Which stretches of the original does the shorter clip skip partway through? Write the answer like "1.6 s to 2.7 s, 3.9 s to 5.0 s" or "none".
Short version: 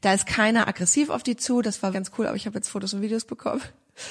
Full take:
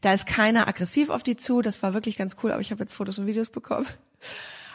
1.9 s to 2.2 s